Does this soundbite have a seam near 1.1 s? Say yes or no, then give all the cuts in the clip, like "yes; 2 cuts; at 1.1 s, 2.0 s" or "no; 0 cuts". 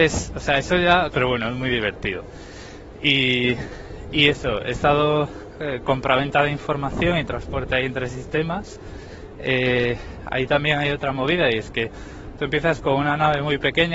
yes; 1 cut; at 1.1 s